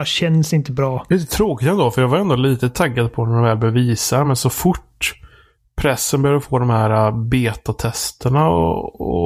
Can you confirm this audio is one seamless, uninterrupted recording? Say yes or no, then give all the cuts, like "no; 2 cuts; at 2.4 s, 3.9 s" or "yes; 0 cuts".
yes; 0 cuts